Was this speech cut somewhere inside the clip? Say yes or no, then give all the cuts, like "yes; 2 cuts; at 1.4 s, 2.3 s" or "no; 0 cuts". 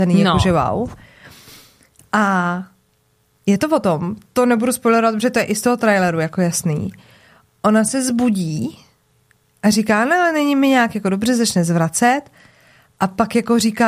no; 0 cuts